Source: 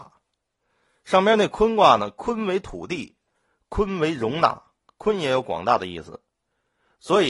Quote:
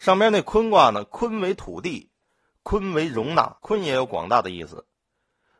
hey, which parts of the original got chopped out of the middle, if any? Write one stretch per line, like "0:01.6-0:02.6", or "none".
0:04.6-0:04.9